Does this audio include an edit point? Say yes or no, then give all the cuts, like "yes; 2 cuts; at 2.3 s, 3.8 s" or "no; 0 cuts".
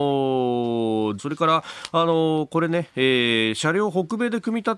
yes; 1 cut; at 1.2 s